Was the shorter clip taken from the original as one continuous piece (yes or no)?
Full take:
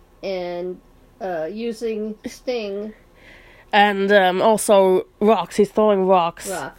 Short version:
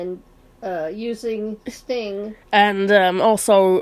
no